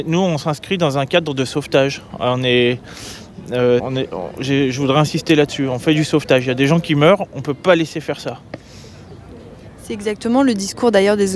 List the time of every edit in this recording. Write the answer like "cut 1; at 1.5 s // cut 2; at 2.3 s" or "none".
cut 1; at 3.8 s